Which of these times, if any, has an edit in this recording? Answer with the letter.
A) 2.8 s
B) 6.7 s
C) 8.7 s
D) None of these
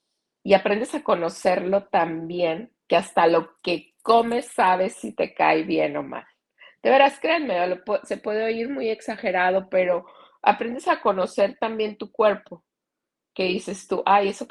A